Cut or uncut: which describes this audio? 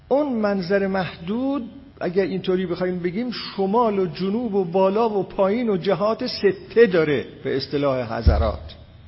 cut